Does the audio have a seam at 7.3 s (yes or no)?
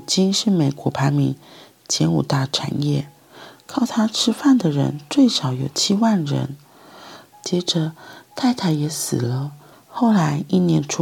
yes